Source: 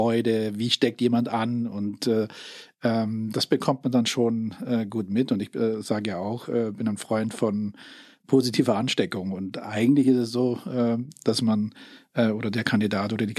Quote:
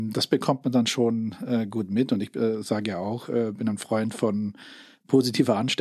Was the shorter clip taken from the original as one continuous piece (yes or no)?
yes